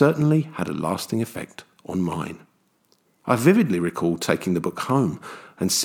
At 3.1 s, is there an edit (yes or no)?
yes